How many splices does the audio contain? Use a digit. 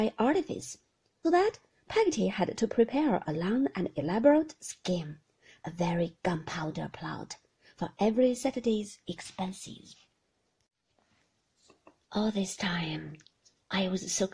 1